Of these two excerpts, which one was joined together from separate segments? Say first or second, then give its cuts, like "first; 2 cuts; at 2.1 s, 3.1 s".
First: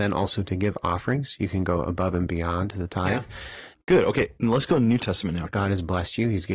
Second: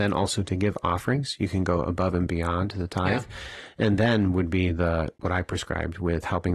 first; 2 cuts; at 3.7 s, 5.5 s